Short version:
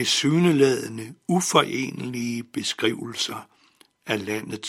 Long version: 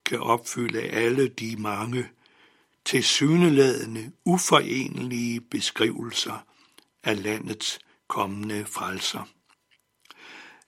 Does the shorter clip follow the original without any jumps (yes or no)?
yes